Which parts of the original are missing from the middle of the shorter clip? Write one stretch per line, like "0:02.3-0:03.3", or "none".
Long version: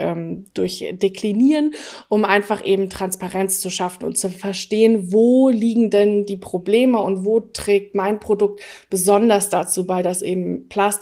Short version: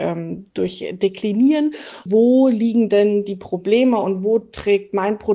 0:02.1-0:05.1